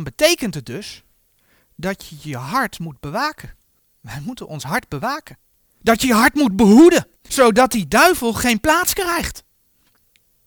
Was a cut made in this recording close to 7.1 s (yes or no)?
yes